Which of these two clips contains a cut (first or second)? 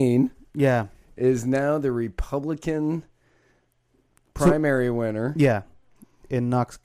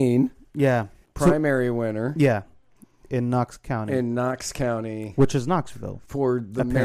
second